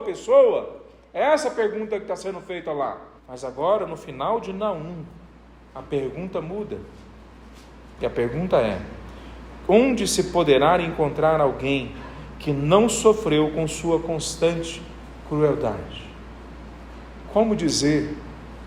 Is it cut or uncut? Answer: cut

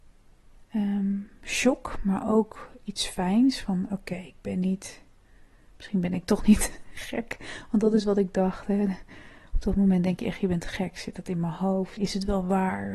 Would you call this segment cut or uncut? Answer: cut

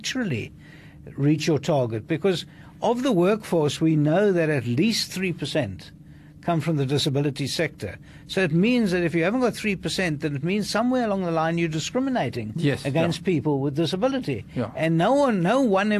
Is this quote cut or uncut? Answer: uncut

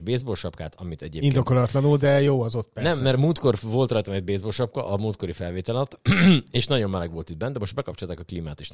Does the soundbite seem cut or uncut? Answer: uncut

